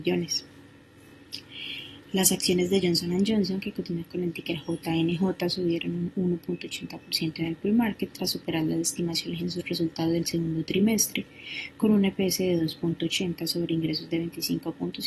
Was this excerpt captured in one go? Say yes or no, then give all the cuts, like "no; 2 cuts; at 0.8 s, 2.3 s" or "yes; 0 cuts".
yes; 0 cuts